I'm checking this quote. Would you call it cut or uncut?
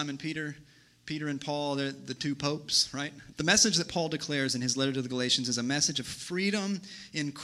cut